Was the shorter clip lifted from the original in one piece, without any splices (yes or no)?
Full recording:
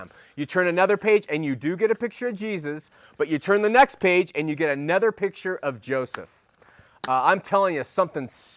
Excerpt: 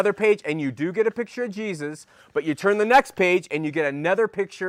yes